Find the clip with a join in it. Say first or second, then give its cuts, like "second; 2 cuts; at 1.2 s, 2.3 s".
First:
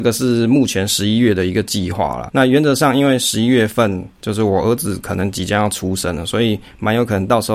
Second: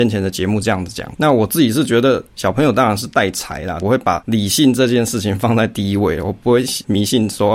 second; 1 cut; at 3.8 s